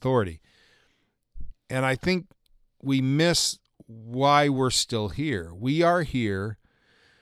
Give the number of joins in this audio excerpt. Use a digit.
1